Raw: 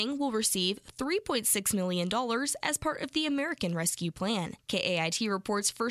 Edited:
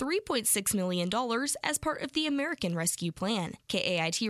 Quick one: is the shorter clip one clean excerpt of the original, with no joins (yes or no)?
yes